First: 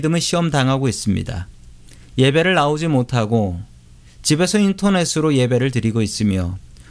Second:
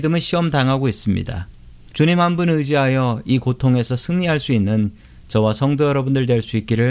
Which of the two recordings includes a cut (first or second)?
second